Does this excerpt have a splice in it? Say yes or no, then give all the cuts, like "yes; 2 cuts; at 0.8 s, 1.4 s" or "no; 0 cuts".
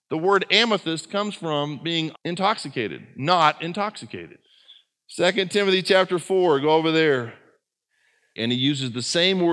yes; 2 cuts; at 2.1 s, 8.4 s